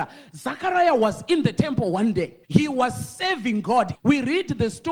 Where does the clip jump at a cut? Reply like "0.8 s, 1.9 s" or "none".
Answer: 2.4 s, 3.9 s